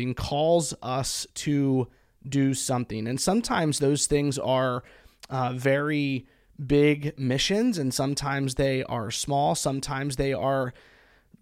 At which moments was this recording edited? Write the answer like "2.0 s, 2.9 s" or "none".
none